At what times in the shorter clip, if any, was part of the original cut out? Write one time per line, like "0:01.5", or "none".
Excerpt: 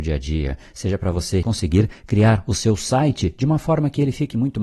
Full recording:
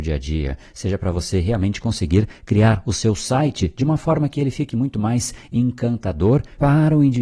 0:01.4

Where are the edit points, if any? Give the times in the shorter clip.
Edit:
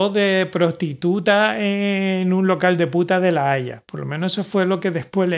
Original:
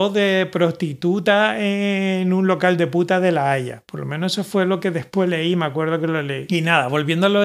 none

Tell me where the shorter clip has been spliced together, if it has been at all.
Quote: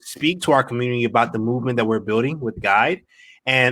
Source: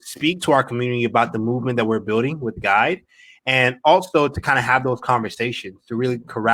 none

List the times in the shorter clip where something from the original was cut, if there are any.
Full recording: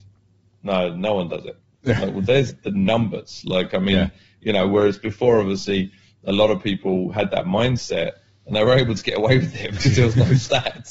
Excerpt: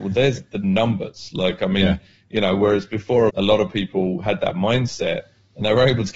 0:03.3

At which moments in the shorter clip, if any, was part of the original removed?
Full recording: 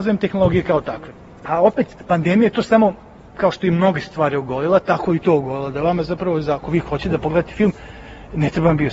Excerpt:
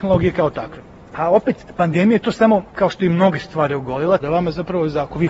0:02.7
0:04.2

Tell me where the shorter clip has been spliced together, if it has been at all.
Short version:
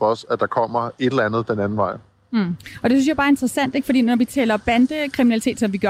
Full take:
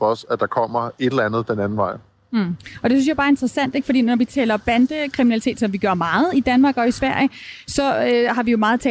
none

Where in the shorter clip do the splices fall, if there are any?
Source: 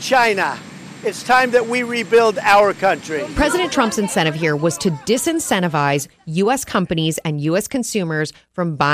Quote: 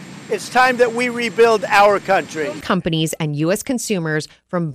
0:02.6

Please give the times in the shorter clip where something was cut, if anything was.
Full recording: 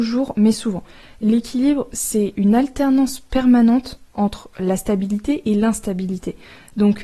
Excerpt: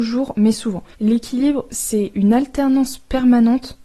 0:00.9

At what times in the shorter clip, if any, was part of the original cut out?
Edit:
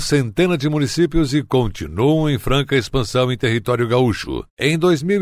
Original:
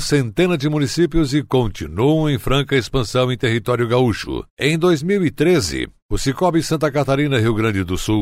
none

